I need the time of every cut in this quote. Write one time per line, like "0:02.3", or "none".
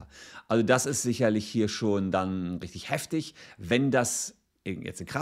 none

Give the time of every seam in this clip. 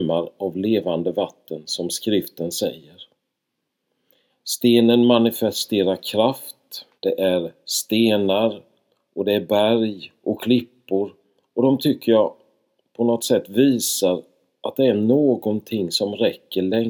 0:04.3
0:07.0

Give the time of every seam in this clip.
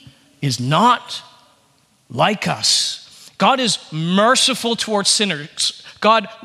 none

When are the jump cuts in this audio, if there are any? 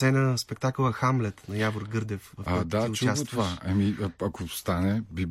none

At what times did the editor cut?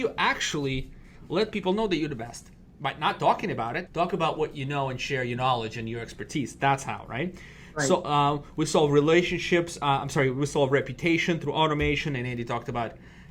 0:03.9

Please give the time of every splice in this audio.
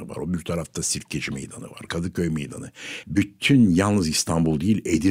0:01.9
0:03.0

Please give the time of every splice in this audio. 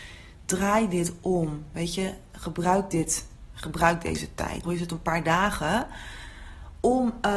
0:04.6

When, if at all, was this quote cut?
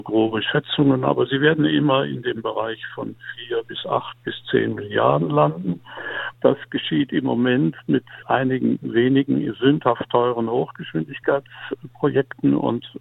0:06.3
0:08.2

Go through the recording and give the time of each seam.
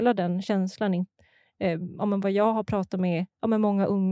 none

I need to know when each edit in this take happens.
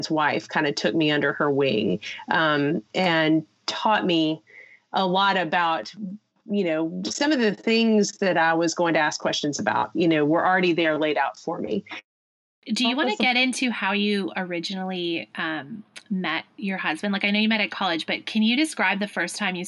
none

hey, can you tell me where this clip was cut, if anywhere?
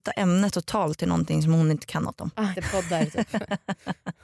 0:02.5

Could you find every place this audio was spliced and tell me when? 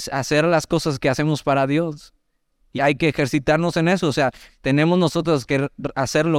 0:02.8
0:04.5

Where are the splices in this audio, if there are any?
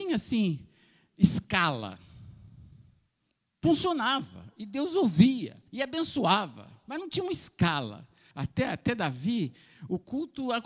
0:05.7
0:08.3

